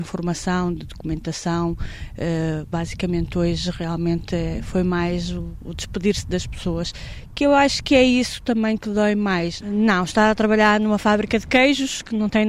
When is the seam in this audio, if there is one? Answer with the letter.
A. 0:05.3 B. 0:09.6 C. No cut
B